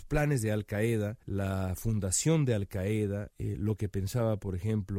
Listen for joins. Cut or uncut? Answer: cut